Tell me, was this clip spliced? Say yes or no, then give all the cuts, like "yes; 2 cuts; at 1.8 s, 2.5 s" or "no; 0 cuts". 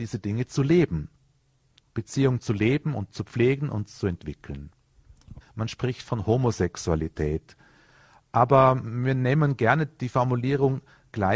yes; 2 cuts; at 1.8 s, 5.4 s